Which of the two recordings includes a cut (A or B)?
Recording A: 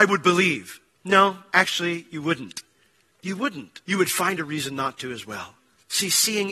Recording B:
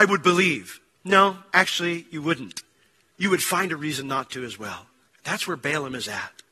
B